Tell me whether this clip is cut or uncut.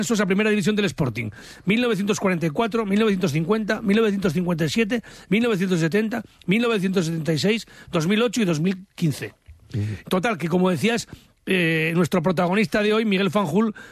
cut